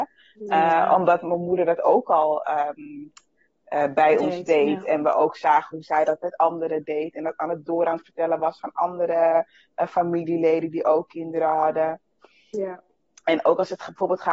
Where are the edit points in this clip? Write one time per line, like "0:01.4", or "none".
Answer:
none

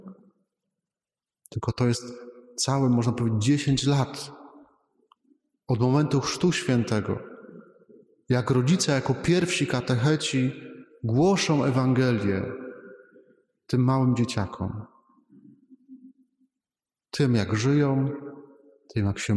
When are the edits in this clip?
none

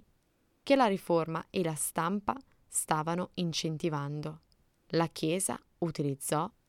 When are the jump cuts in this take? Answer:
0:04.8

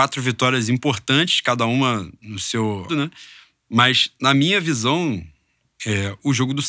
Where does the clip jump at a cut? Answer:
0:02.9

